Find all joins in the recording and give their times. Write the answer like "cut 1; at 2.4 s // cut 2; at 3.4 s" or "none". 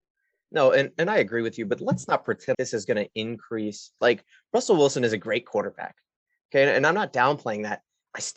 cut 1; at 2.5 s // cut 2; at 4.0 s